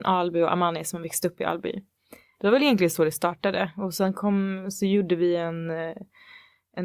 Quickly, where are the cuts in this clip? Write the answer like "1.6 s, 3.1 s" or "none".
2.3 s